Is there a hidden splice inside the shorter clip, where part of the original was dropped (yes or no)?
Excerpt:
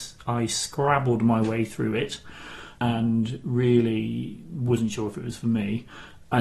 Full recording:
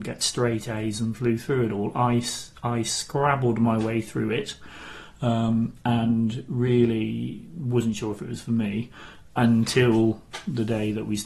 yes